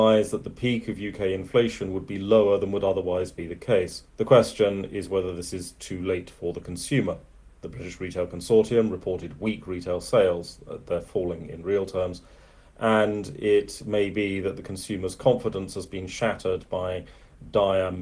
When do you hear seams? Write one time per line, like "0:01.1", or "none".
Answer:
0:04.1